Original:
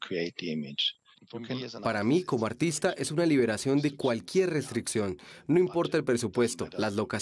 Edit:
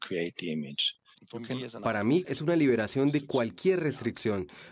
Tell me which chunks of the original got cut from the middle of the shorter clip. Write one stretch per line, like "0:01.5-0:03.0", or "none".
0:02.2-0:02.9